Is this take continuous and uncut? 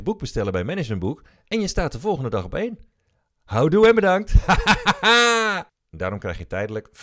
no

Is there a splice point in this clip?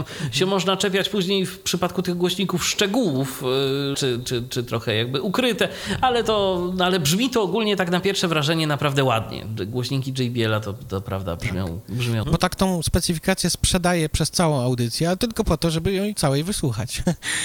yes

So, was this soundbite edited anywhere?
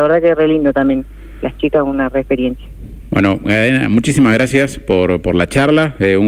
no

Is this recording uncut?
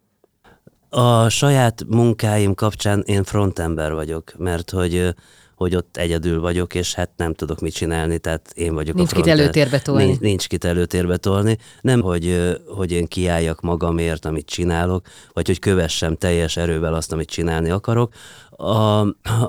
no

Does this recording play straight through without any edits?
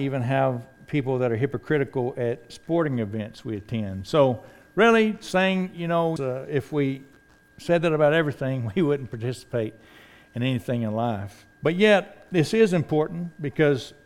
no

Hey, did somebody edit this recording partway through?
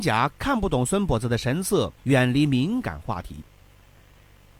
yes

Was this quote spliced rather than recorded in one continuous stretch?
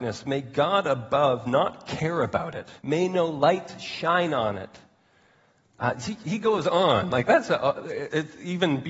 yes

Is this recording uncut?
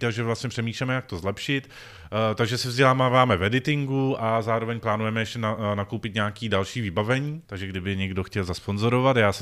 no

